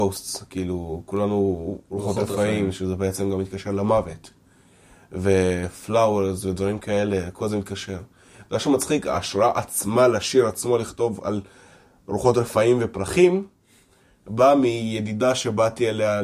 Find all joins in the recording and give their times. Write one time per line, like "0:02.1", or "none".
none